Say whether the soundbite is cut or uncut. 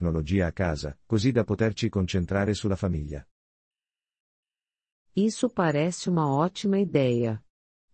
uncut